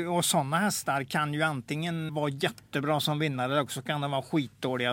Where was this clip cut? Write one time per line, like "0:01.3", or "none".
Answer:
0:02.1